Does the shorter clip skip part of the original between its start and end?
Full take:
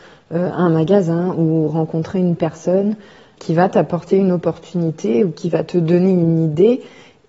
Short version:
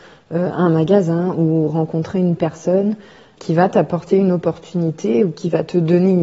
no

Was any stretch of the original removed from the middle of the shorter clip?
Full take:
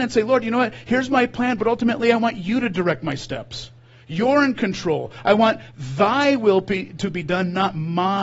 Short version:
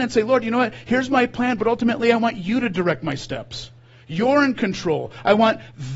no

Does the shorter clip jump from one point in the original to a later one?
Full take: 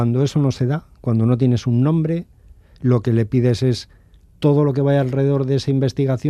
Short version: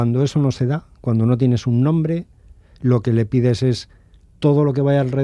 no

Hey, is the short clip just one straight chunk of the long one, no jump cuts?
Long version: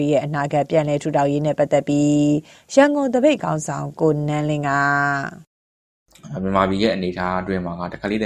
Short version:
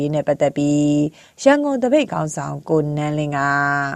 yes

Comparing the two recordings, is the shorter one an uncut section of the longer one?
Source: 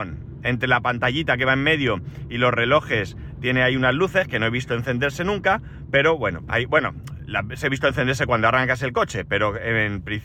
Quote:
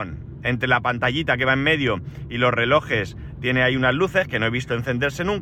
yes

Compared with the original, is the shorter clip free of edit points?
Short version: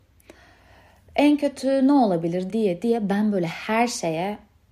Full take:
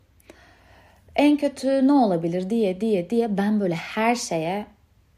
no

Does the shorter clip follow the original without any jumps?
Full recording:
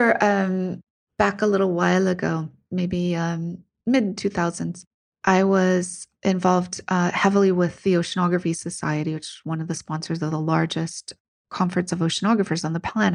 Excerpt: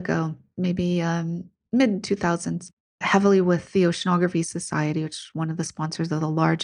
no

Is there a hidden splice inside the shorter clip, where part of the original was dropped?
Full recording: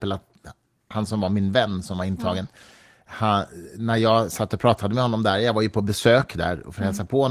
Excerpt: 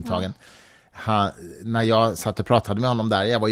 no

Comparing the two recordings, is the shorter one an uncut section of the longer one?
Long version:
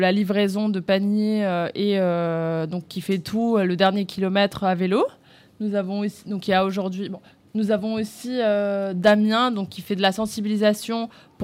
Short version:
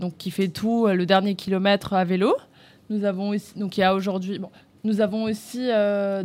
yes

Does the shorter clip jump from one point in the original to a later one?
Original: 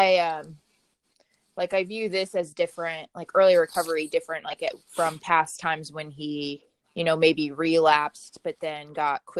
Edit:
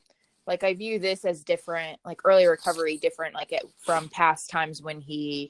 no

